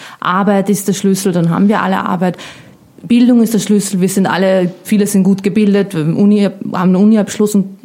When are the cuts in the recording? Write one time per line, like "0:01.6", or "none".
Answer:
0:04.8